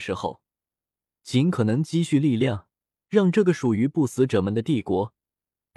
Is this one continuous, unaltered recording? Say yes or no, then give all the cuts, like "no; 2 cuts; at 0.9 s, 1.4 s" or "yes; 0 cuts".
yes; 0 cuts